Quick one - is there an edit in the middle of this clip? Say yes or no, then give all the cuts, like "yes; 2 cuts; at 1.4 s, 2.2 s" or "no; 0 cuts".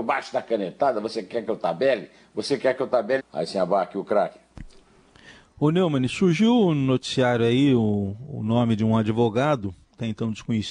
yes; 1 cut; at 3.2 s